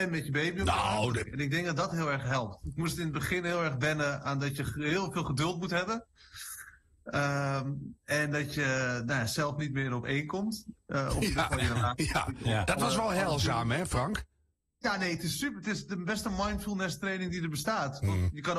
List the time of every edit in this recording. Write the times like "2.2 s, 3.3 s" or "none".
1.2 s